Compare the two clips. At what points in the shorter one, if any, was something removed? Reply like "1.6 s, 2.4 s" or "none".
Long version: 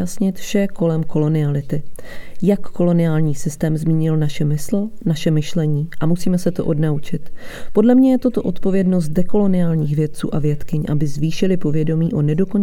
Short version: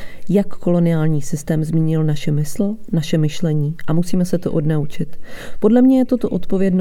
none